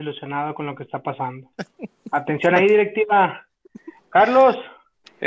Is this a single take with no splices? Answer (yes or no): yes